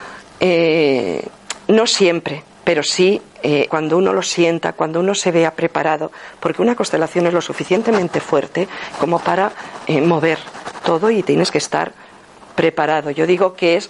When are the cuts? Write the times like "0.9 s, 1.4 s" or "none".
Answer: 3.7 s